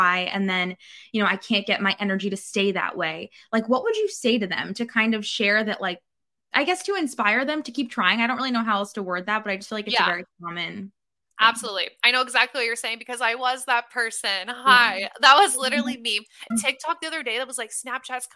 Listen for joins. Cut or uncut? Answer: cut